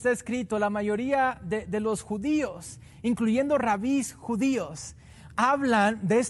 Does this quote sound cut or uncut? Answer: uncut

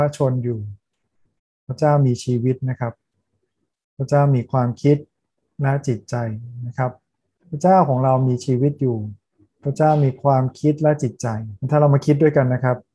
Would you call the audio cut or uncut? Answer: cut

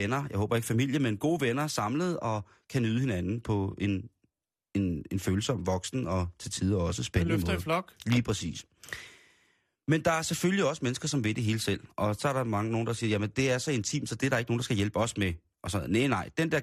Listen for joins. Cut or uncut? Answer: uncut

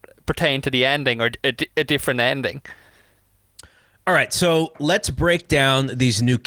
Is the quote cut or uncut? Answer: uncut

